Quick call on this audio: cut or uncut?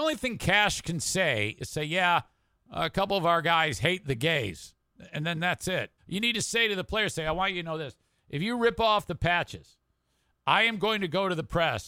cut